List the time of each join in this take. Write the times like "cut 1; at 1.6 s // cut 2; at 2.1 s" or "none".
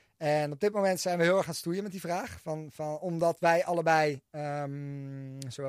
none